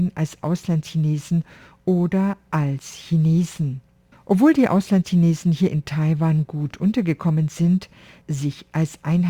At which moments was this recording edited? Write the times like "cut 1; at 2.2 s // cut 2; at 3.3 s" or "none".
cut 1; at 4.1 s // cut 2; at 8.2 s